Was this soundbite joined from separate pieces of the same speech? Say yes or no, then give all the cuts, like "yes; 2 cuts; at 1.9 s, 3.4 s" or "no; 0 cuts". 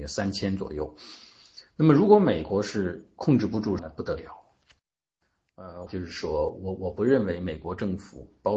yes; 2 cuts; at 3.8 s, 5.9 s